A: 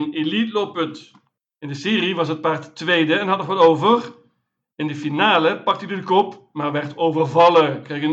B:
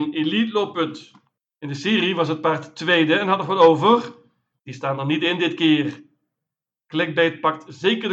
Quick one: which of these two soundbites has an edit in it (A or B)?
B